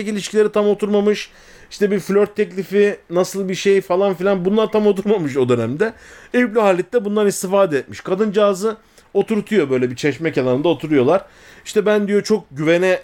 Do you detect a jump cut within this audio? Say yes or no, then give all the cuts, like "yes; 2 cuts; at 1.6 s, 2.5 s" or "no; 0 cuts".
no; 0 cuts